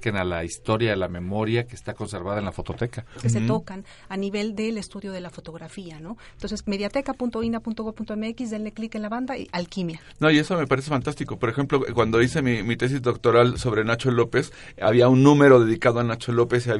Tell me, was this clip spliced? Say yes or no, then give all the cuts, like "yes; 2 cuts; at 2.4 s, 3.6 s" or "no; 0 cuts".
yes; 1 cut; at 3.2 s